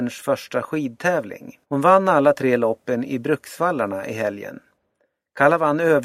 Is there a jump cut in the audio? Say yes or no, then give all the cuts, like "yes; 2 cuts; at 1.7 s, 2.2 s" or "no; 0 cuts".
yes; 1 cut; at 1.6 s